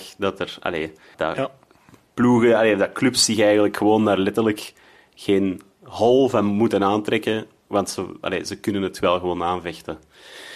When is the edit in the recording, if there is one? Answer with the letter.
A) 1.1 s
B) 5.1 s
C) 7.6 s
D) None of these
A